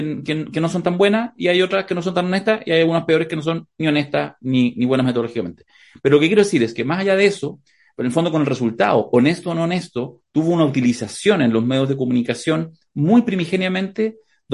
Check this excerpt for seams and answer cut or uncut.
uncut